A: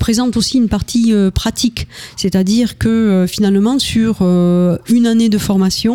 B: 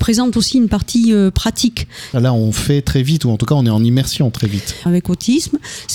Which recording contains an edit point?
B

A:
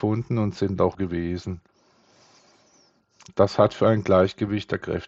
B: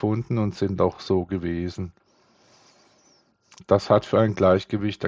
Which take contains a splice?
A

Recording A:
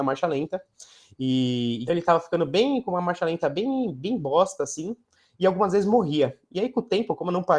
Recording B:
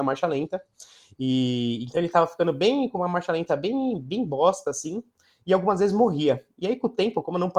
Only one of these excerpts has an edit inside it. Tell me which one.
A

